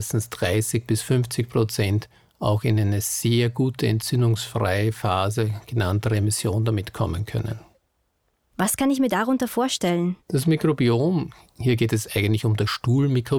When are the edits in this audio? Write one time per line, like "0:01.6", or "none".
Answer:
0:08.5
0:10.2